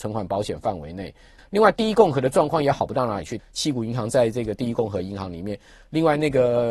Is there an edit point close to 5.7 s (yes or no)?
no